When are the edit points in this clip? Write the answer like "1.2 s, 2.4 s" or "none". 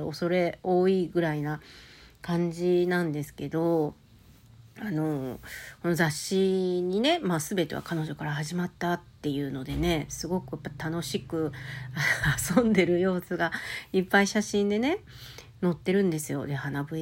none